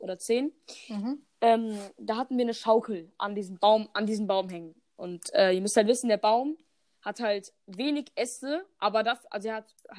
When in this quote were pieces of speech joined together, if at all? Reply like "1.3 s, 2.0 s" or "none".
none